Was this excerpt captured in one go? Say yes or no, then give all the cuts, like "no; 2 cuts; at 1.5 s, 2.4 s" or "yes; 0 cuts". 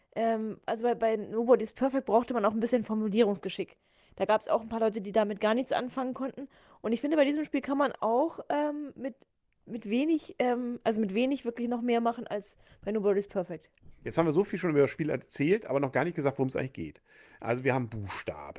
yes; 0 cuts